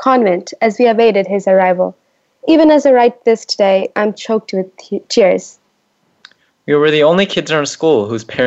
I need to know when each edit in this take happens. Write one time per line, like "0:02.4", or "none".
none